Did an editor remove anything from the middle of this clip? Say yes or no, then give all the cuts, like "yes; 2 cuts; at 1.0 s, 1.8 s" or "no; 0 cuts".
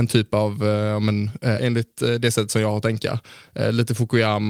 yes; 1 cut; at 1.6 s